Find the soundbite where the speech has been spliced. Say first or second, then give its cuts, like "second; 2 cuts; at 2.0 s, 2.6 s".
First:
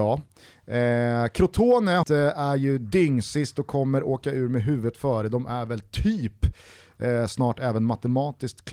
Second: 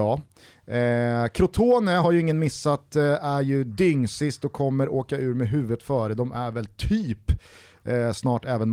first; 1 cut; at 2.0 s